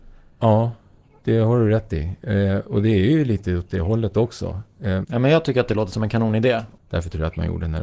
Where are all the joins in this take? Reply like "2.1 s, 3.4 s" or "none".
5.0 s, 6.8 s